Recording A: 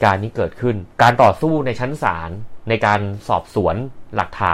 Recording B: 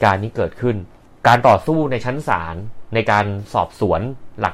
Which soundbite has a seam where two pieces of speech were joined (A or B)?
A